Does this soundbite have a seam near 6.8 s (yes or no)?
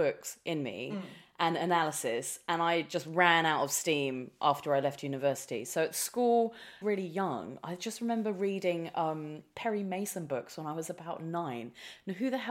yes